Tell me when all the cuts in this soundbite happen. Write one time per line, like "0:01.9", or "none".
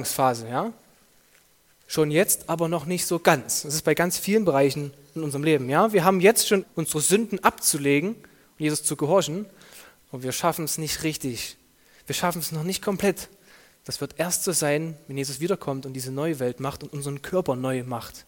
0:06.6